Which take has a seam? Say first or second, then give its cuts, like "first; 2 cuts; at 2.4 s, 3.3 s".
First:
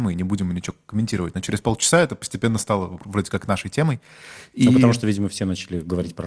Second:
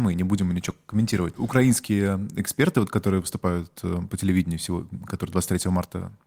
second; 1 cut; at 1.3 s